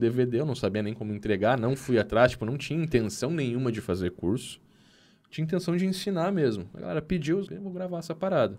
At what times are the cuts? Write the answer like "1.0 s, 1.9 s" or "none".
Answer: 7.5 s